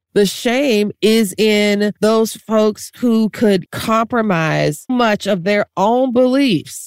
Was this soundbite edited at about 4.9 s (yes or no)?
yes